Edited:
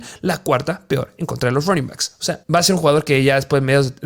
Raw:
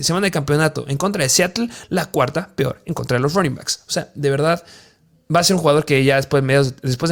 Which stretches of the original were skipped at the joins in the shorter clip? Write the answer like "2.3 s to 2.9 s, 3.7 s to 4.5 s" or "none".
4.1 s to 5.2 s